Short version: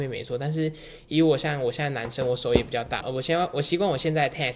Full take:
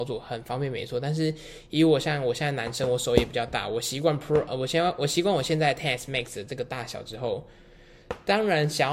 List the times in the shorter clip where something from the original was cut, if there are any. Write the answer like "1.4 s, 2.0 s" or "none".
3.0 s